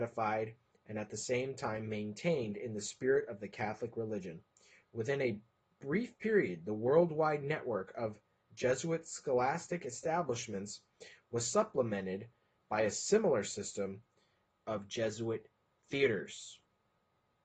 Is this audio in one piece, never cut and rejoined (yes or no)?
yes